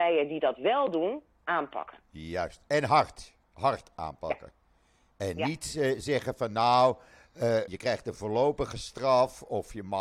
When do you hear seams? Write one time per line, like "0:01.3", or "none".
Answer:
0:03.4
0:07.7

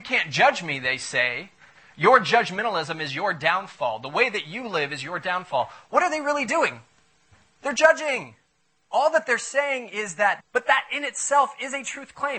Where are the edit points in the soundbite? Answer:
0:08.8
0:10.4

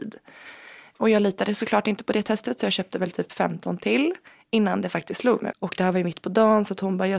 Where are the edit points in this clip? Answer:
0:05.5

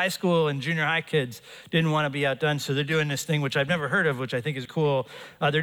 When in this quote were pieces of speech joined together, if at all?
0:04.7

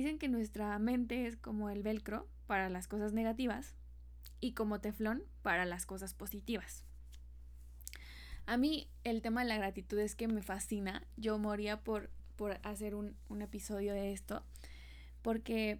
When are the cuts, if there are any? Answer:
none

